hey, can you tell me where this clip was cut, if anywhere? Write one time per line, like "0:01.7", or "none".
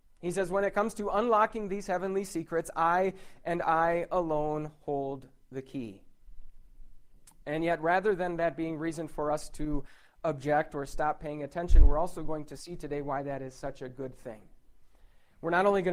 none

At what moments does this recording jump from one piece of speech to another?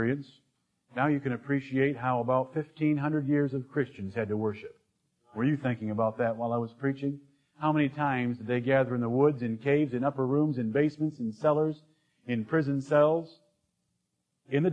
none

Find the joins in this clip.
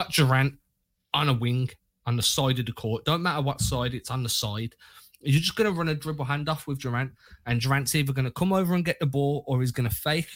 none

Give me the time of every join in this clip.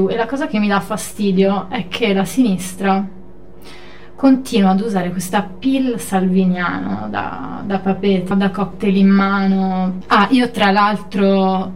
0:08.3
0:10.0

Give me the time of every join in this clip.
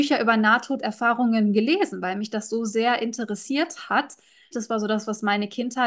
0:04.5

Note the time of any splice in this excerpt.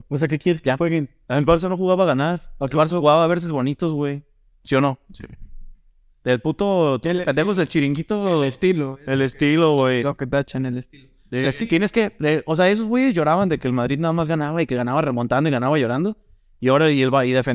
none

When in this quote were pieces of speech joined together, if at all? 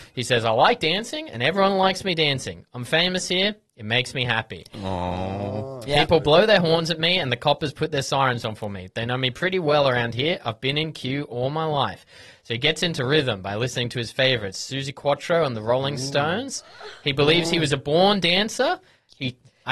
none

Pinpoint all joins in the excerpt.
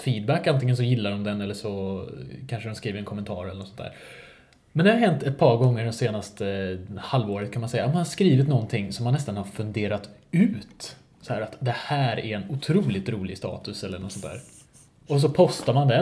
none

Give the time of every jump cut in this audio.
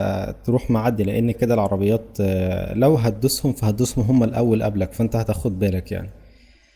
0:01.3

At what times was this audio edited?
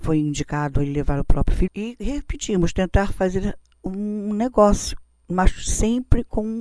0:01.7

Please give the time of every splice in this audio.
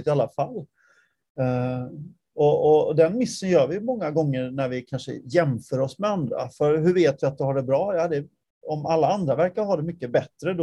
none

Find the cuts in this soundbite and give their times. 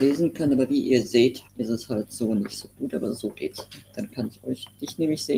0:01.5

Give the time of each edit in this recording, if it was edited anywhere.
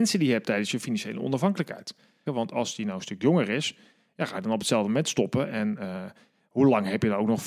0:02.3

